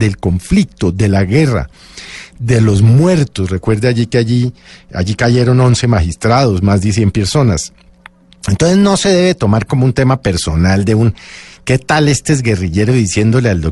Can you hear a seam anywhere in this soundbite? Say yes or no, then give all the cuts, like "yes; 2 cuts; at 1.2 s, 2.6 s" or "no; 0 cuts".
no; 0 cuts